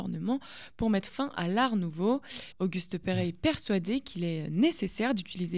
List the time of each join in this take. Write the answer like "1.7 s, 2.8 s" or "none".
2.5 s